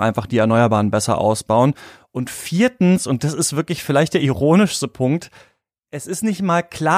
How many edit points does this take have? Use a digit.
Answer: 0